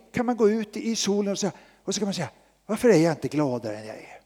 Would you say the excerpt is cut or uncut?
uncut